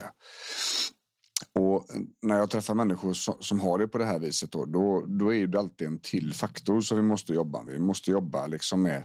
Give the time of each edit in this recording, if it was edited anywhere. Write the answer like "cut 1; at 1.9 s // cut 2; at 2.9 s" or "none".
none